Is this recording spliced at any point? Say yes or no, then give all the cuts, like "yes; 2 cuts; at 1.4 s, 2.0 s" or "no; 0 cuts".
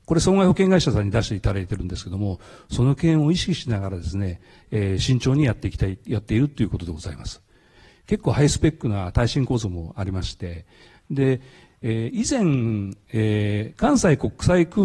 yes; 1 cut; at 7.9 s